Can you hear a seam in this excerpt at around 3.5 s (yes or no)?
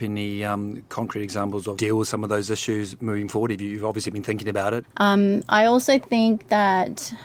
no